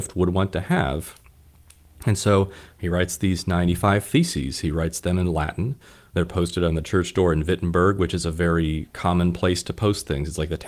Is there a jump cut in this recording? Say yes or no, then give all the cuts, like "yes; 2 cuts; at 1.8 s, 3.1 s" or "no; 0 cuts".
no; 0 cuts